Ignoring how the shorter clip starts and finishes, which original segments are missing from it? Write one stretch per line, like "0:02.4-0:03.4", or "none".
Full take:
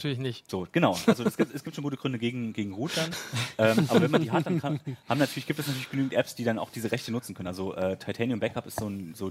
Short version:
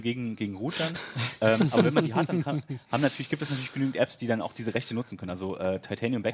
none